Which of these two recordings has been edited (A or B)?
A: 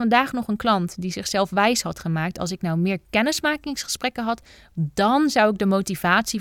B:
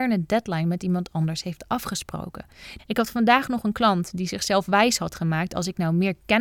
B